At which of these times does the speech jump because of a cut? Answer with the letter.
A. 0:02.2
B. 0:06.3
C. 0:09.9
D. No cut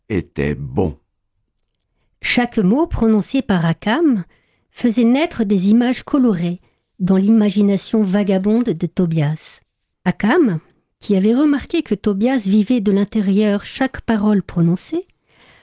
C